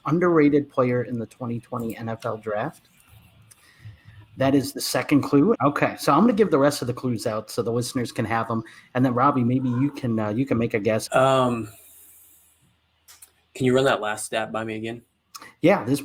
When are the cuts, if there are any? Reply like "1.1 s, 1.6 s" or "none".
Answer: 5.5 s, 11.1 s

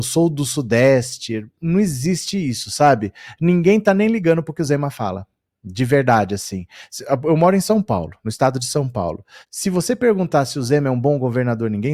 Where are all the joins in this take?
9.4 s

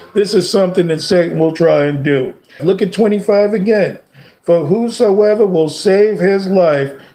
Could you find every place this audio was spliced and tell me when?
2.6 s

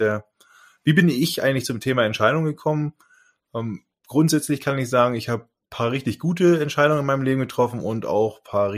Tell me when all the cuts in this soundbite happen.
none

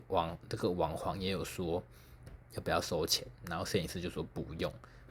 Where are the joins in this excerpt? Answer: none

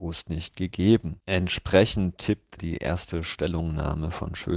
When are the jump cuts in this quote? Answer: 2.6 s

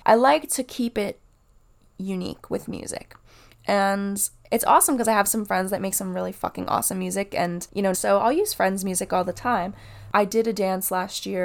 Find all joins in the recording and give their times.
7.9 s, 10.1 s

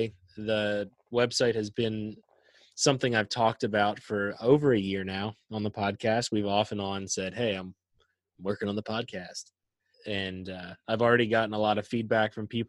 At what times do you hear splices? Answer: 9.9 s

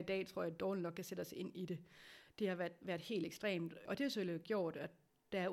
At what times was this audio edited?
none

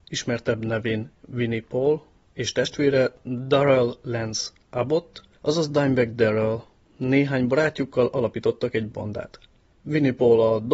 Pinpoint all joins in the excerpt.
9.7 s

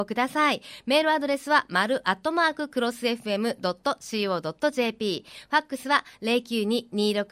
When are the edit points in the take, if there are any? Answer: none

